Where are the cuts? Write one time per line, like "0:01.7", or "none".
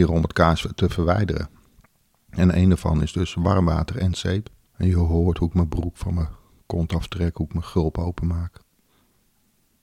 none